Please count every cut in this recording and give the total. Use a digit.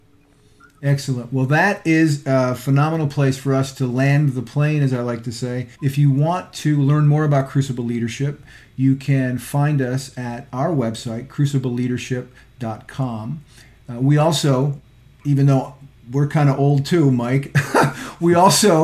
1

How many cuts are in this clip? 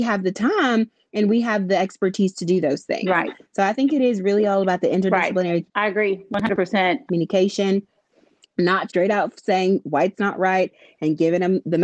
3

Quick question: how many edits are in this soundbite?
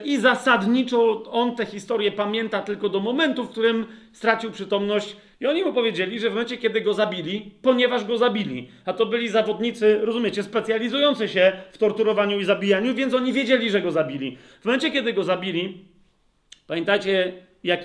1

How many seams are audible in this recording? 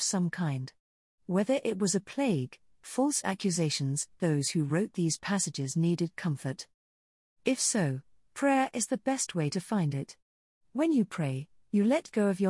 2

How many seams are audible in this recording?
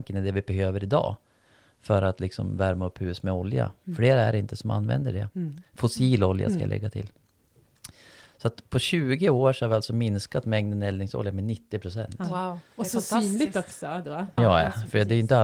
1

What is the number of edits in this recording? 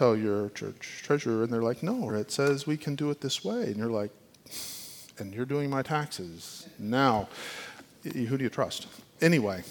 1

